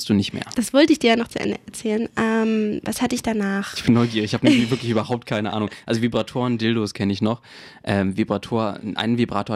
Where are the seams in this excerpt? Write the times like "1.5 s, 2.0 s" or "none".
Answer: none